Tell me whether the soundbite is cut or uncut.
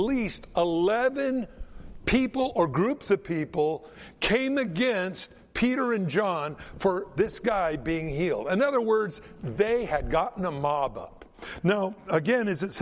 uncut